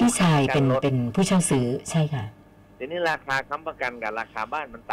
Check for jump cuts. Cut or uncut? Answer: uncut